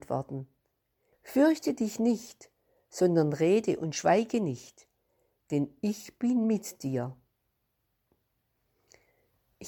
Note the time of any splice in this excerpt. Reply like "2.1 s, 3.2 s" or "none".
1.1 s